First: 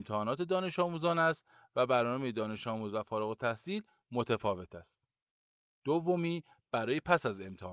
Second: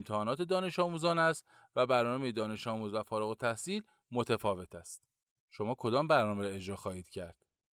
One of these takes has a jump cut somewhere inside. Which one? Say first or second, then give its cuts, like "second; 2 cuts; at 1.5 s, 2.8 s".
second; 1 cut; at 5.3 s